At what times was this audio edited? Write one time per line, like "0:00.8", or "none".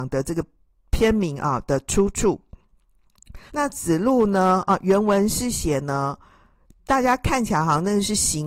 0:03.5
0:06.8